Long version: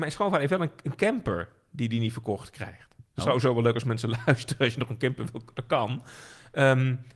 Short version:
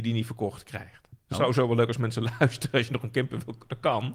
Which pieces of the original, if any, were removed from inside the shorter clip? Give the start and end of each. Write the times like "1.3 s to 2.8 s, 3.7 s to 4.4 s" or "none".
none